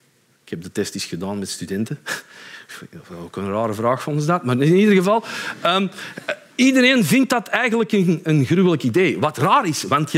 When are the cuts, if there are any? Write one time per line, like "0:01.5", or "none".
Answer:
none